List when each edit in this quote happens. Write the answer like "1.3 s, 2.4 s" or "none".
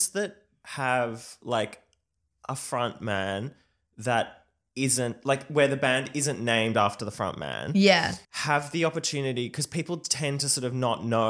8.2 s